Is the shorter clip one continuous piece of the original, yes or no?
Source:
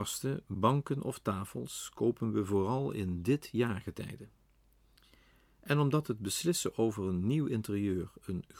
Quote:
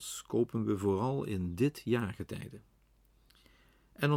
yes